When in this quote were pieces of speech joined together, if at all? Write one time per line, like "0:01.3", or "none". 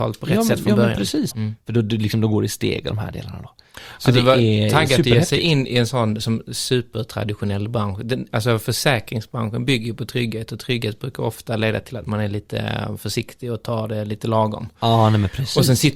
0:01.3